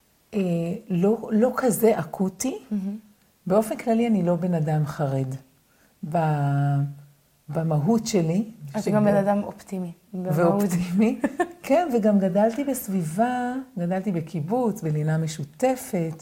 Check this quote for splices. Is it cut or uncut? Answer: uncut